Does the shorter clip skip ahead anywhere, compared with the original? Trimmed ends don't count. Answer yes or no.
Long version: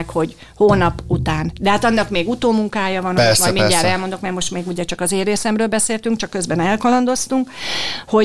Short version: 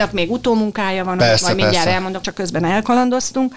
yes